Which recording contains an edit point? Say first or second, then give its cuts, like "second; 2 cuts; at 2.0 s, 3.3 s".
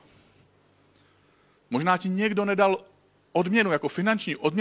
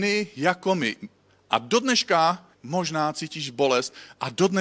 second; 2 cuts; at 1.3 s, 2.5 s